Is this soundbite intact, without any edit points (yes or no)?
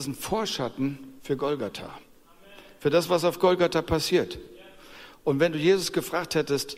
no